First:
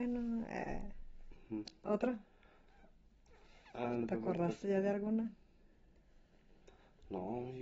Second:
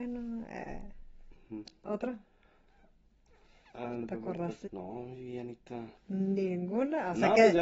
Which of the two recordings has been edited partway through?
second; 2 cuts; at 4.7 s, 6.0 s

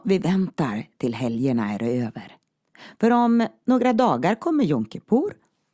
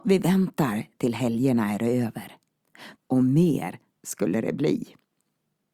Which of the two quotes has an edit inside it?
second; 1 cut; at 3.0 s

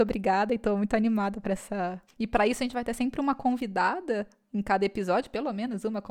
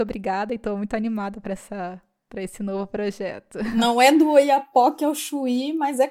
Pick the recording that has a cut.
first; 1 cut; at 2.1 s

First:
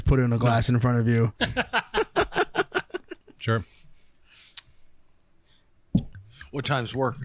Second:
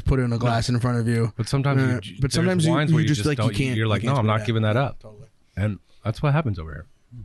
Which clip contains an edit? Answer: first; 1 cut; at 1.3 s

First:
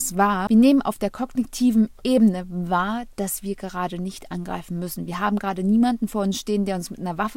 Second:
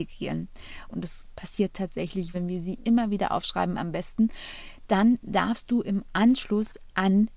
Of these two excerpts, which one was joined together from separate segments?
second; 2 cuts; at 0.9 s, 2.3 s

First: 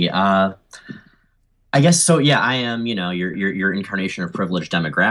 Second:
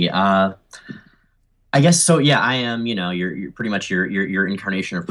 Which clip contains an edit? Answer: first; 1 cut; at 3.3 s

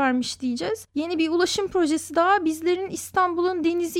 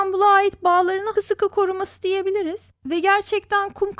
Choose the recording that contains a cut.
second; 2 cuts; at 1.2 s, 2.8 s

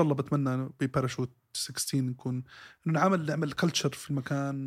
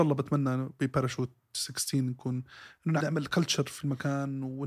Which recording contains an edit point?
second; 1 cut; at 3.0 s

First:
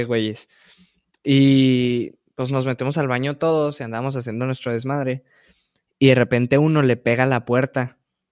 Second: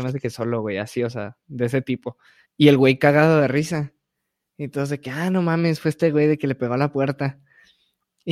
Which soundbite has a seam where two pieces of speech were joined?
second; 1 cut; at 2.5 s

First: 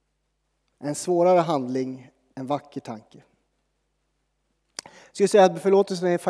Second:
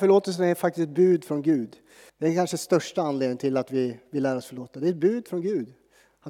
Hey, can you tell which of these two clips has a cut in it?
second; 1 cut; at 2.1 s

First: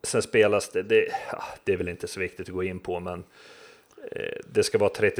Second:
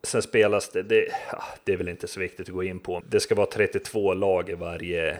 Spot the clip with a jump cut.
second; 1 cut; at 3.0 s

